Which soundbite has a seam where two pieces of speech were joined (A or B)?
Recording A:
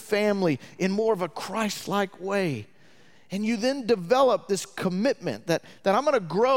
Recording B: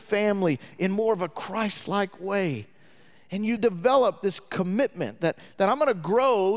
B